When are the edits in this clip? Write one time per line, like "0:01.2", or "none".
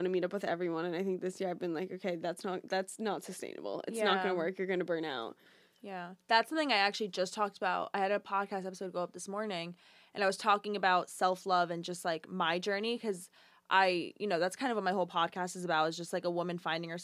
none